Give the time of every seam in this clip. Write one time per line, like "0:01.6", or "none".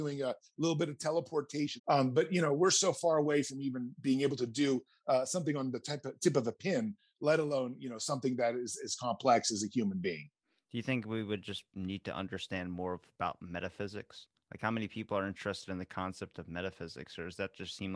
0:01.8